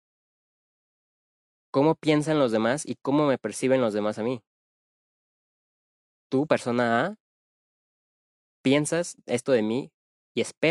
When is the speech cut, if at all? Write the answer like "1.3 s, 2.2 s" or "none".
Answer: none

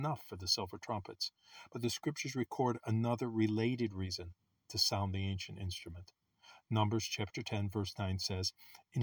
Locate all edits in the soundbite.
none

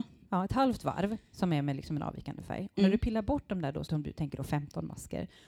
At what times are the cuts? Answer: 3.9 s

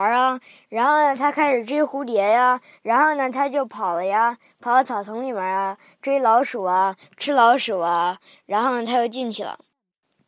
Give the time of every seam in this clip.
none

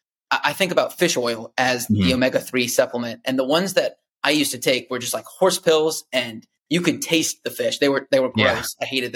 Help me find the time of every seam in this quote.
none

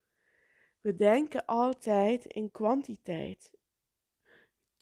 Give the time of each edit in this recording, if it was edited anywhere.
none

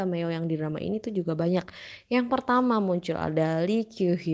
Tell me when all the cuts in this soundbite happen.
none

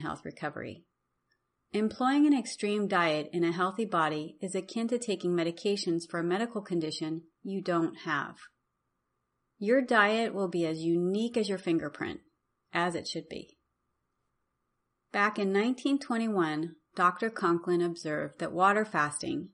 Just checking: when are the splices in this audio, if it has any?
none

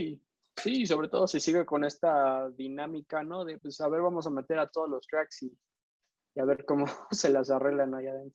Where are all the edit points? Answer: none

